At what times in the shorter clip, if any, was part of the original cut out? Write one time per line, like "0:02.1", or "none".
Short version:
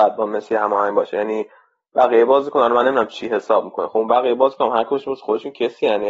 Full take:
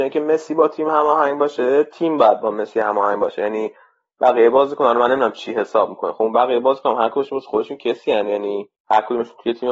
none

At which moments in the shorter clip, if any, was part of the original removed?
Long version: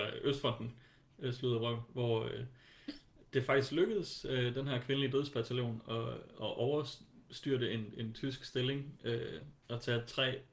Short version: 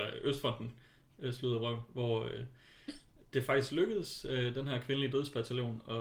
none

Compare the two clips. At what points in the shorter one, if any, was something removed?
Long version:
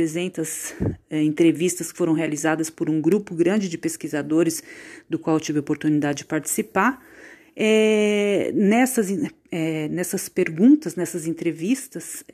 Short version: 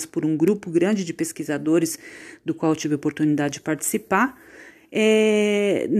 none

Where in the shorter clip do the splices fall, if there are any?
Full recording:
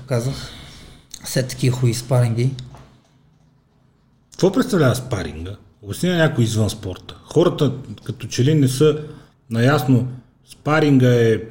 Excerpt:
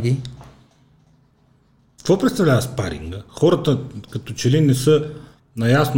0:03.3

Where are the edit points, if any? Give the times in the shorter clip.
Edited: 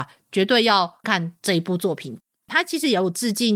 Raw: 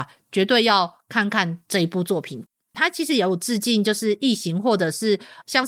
0:01.0

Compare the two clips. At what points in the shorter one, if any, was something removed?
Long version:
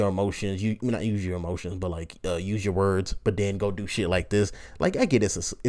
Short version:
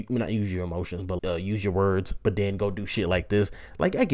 0:01.2

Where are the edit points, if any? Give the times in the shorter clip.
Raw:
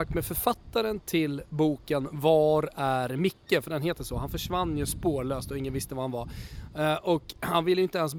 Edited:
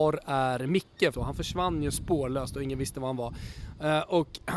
0:01.1

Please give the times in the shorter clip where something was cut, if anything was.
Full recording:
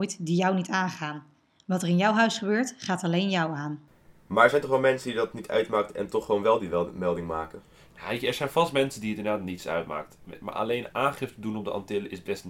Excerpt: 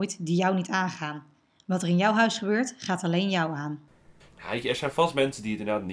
0:04.2

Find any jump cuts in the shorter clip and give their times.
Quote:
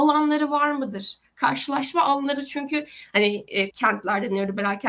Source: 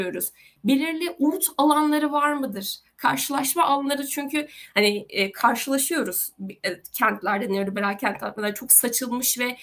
0:03.7

